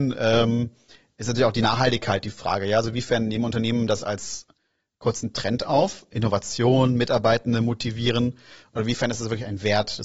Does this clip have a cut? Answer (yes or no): no